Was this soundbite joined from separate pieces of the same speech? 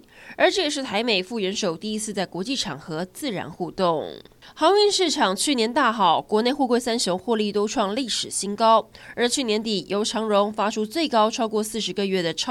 no; 0 cuts

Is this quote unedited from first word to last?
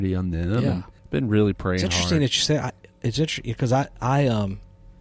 no; 1 cut; at 1.0 s

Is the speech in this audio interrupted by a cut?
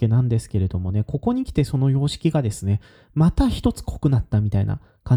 no; 0 cuts

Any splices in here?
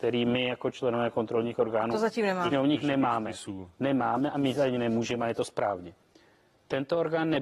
no; 0 cuts

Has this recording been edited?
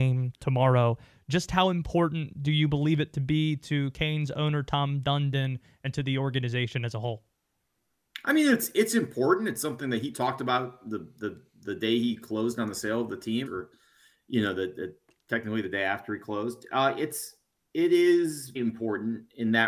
yes; 2 cuts; at 13.5 s, 18.6 s

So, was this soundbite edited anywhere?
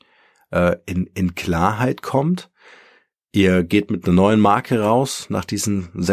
no; 0 cuts

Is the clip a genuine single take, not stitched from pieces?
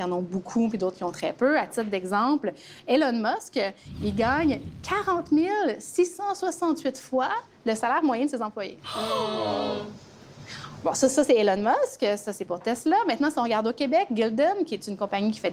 yes; 0 cuts

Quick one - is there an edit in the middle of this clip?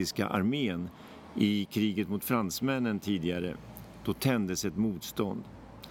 no; 0 cuts

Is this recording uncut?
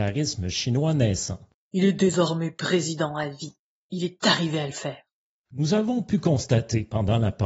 no; 1 cut; at 5.5 s

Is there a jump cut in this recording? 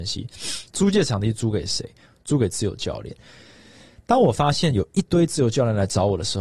no; 0 cuts

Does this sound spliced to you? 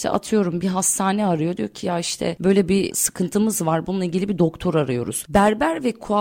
no; 0 cuts

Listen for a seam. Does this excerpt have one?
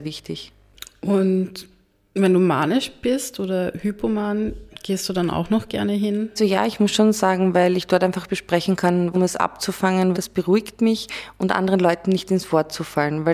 yes; 3 cuts; at 6.4 s, 9.1 s, 10.1 s

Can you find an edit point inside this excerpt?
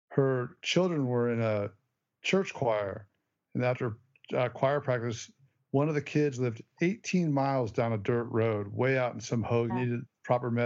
yes; 1 cut; at 9.7 s

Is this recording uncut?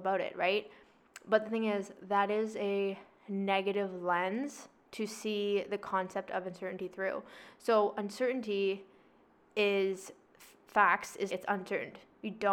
no; 1 cut; at 11.3 s

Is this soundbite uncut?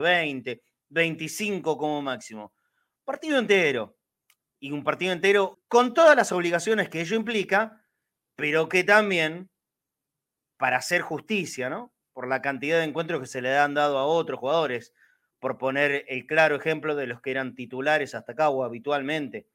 no; 1 cut; at 5.5 s

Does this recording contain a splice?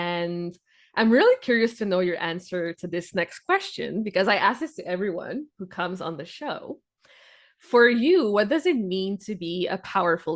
no; 0 cuts

